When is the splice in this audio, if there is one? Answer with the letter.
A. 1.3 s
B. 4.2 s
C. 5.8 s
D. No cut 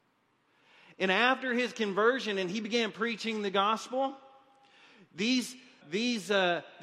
C